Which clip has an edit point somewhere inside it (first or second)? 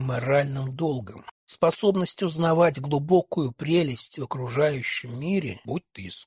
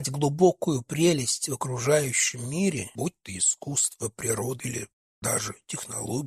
first